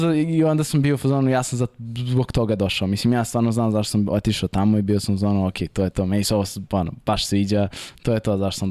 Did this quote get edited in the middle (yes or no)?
no